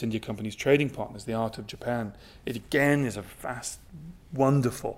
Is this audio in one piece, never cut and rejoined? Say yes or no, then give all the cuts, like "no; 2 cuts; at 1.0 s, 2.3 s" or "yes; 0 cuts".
yes; 0 cuts